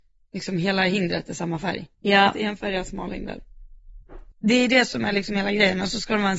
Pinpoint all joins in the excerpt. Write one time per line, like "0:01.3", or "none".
0:01.9
0:04.3